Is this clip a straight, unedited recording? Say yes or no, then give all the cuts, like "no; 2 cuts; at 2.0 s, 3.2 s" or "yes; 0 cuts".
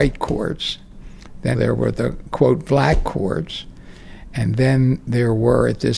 no; 1 cut; at 1.5 s